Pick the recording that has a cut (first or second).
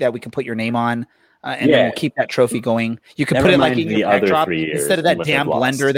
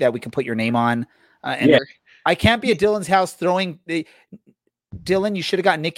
second